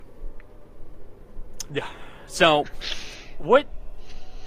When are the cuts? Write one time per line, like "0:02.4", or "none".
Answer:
0:01.7